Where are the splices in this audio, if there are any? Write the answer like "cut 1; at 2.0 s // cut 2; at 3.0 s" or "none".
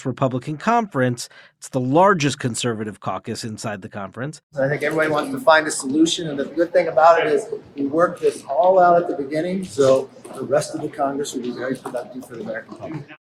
cut 1; at 4.4 s